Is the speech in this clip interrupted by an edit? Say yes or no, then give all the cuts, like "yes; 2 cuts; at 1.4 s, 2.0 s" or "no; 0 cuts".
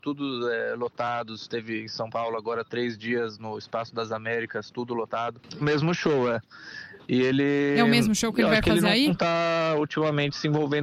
yes; 1 cut; at 5.6 s